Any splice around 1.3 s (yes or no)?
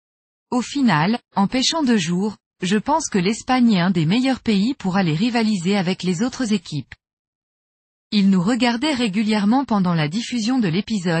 no